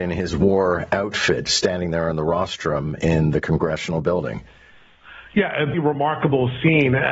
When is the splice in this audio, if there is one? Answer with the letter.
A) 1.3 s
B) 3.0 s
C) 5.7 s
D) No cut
C